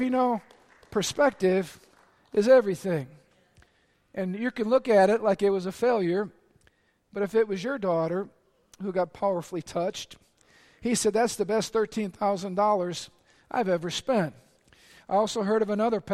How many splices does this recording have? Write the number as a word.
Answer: zero